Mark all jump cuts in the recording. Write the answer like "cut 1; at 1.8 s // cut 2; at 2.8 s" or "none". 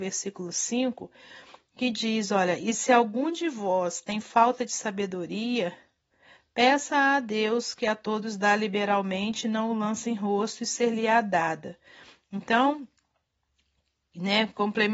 none